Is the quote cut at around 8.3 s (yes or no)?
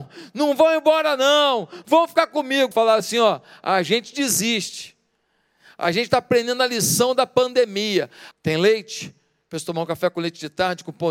yes